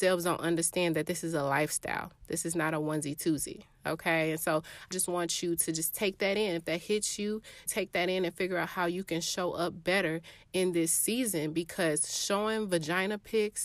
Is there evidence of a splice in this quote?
yes; 2 cuts; at 4.9 s, 7.7 s

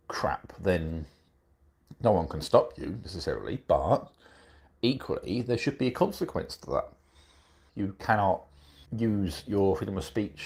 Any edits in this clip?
yes; 2 cuts; at 7.7 s, 8.9 s

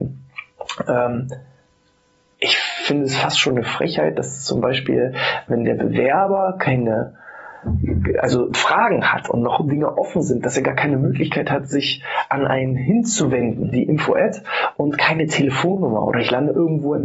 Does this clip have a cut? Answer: yes; 1 cut; at 13.7 s

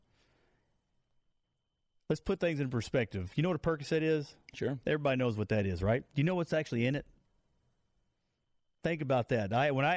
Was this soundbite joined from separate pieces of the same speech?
no; 0 cuts

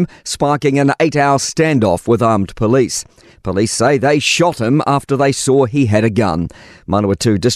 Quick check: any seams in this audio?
no; 0 cuts

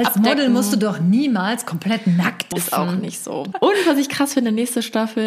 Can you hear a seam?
yes; 2 cuts; at 2.5 s, 3.5 s

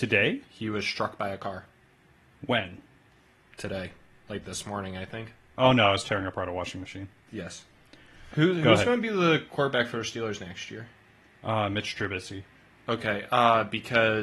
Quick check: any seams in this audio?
yes; 2 cuts; at 5.5 s, 8.3 s

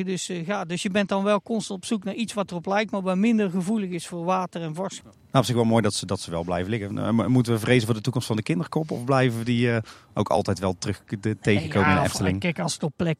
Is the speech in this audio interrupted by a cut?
yes; 1 cut; at 5.0 s

